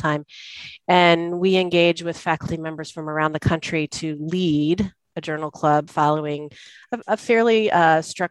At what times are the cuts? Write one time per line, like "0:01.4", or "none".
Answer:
0:05.9